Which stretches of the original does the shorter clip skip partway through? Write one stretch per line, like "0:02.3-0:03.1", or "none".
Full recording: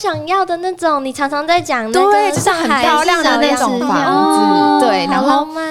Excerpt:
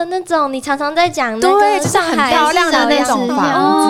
none